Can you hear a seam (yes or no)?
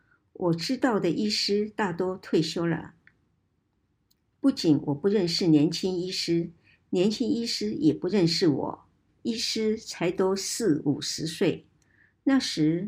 yes